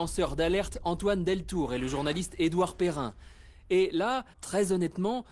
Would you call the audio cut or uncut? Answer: cut